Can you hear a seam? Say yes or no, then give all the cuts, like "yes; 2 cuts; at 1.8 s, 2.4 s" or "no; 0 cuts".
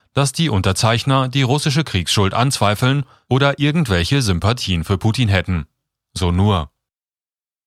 no; 0 cuts